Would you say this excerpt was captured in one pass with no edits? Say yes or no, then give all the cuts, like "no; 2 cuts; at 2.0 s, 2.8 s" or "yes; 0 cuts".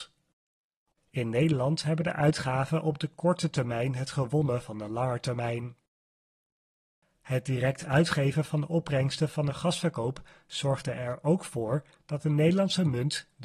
no; 1 cut; at 0.9 s